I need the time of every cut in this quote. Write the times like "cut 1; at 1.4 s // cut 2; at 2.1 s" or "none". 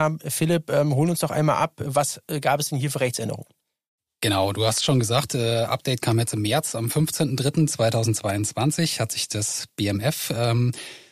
none